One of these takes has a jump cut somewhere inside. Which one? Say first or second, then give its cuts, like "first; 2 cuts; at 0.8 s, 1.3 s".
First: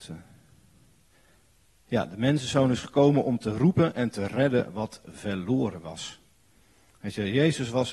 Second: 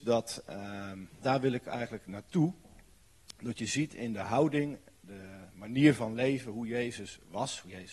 second; 1 cut; at 1.2 s